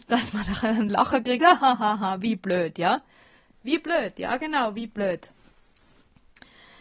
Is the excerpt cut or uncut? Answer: uncut